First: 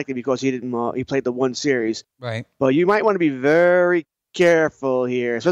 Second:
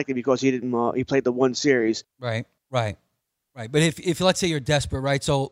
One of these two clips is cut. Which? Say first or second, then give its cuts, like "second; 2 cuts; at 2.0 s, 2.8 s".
second; 1 cut; at 2.6 s